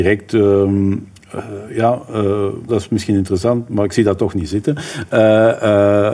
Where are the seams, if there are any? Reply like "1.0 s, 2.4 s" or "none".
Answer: 2.7 s